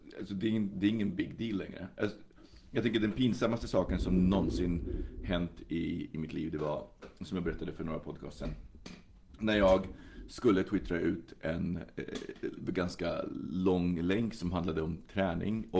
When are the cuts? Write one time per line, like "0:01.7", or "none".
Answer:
none